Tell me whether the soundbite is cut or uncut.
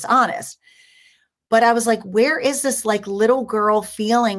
uncut